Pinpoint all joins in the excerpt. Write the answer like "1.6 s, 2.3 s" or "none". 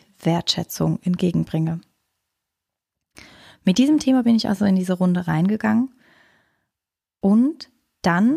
none